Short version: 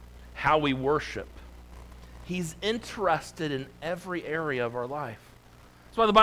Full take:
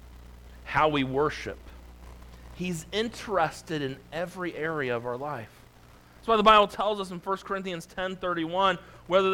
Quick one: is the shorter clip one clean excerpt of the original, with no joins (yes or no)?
yes